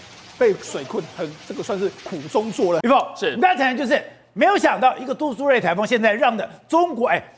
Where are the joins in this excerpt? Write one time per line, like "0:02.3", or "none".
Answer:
0:02.8

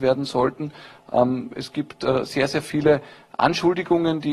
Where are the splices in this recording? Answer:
none

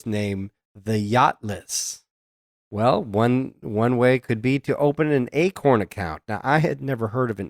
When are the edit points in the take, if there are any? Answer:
0:02.5

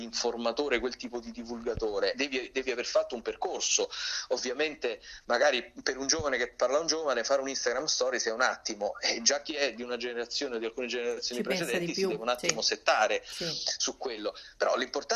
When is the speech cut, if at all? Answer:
0:02.1

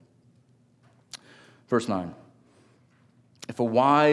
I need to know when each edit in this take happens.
none

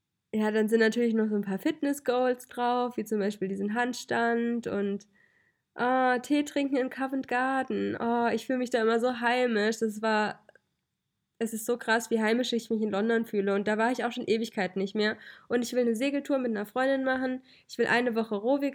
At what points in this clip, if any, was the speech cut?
none

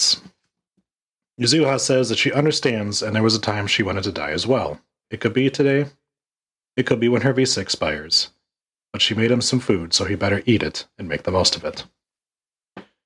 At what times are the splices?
0:05.0

